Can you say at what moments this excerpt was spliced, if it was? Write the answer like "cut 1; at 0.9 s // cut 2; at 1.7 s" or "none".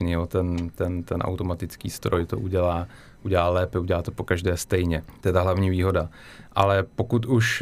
none